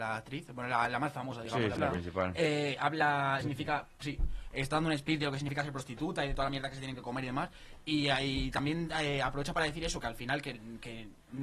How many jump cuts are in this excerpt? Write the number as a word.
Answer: two